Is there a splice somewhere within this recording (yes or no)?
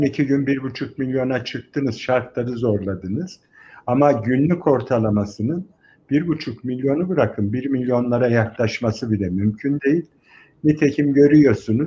no